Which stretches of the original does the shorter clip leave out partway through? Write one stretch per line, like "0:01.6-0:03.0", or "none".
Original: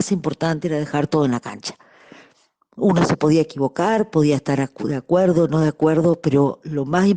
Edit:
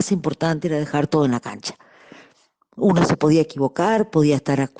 none